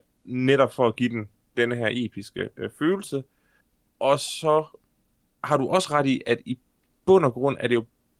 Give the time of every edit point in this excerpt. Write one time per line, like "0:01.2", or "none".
none